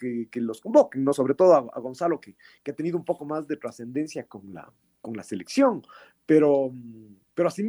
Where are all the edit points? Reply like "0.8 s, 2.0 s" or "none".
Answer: none